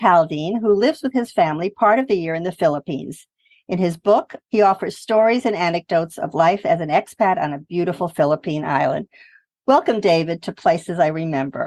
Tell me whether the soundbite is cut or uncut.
cut